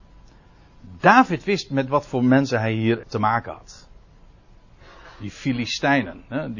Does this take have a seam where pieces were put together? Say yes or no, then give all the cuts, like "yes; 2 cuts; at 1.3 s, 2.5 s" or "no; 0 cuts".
yes; 1 cut; at 3.0 s